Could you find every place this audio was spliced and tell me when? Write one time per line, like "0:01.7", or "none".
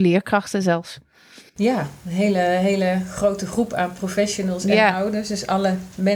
0:01.5